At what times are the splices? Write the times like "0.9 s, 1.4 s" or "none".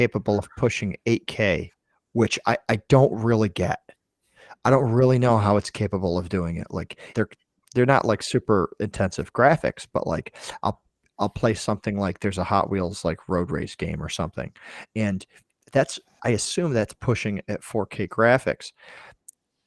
7.1 s